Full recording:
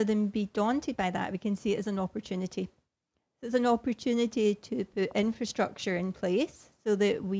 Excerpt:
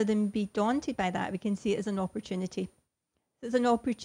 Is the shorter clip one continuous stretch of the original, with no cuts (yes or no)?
yes